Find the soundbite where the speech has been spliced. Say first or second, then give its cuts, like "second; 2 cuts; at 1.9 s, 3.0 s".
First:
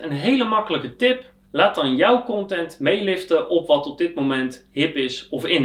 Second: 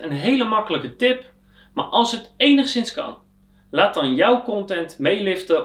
first; 1 cut; at 1.5 s